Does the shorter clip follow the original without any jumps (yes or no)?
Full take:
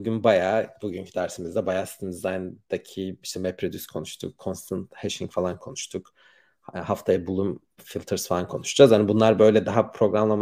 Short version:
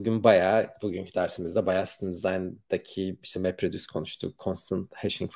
yes